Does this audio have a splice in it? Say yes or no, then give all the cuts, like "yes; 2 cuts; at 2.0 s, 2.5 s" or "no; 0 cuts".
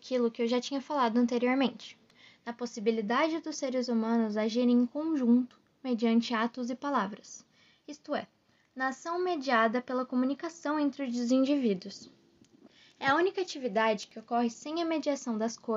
no; 0 cuts